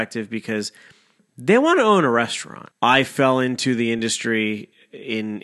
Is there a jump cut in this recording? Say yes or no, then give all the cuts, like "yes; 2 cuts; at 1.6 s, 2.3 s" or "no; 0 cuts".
yes; 1 cut; at 2.7 s